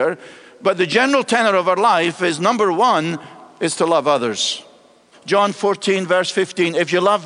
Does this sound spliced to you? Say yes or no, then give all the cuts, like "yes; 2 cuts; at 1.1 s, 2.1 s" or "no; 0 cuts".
yes; 1 cut; at 5.1 s